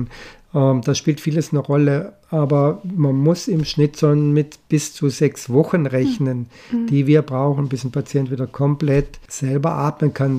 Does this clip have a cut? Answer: no; 0 cuts

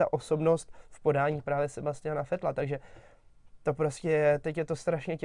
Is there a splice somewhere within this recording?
no; 0 cuts

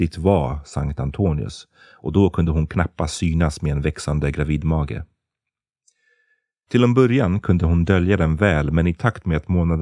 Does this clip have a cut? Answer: no; 0 cuts

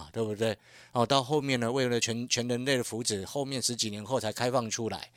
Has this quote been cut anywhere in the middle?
no; 0 cuts

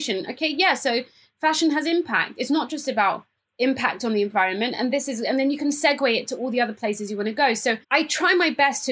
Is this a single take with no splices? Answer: no; 1 cut; at 7.8 s

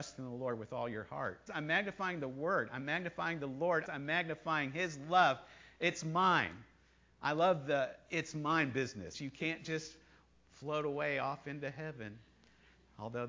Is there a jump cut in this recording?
yes; 3 cuts; at 1.5 s, 3.9 s, 9.1 s

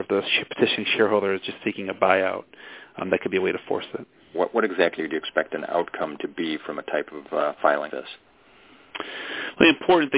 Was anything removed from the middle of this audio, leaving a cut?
yes; 2 cuts; at 4.3 s, 7.9 s

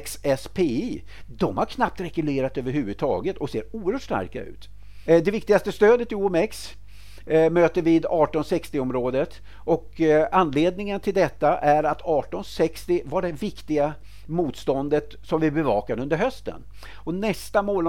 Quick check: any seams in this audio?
yes; 2 cuts; at 5.0 s, 16.9 s

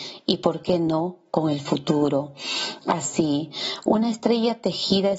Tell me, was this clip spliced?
yes; 1 cut; at 2.8 s

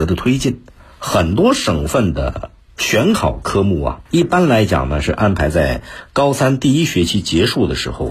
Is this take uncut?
no; 1 cut; at 4.1 s

